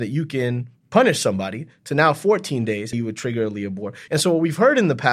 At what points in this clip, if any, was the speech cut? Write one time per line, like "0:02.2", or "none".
0:02.9
0:04.1